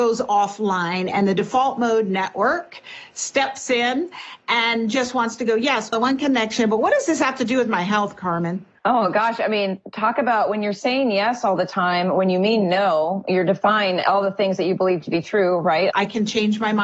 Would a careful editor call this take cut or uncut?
cut